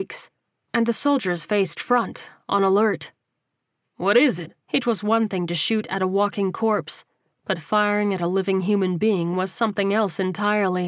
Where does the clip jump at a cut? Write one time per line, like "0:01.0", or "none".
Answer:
0:04.6